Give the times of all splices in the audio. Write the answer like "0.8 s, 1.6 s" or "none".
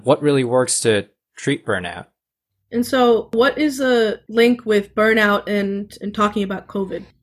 none